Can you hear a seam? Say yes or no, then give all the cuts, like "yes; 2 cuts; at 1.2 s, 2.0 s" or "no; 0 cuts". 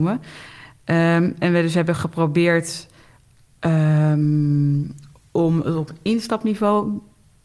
no; 0 cuts